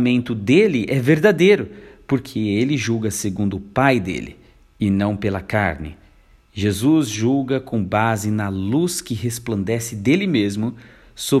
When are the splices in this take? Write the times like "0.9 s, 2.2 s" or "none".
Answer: none